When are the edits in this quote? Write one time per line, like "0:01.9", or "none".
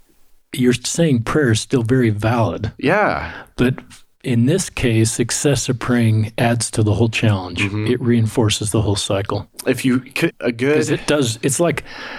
0:10.3